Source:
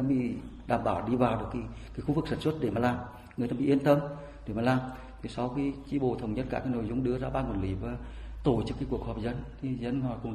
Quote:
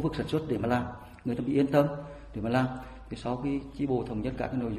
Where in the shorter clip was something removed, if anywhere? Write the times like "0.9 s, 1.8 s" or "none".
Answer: none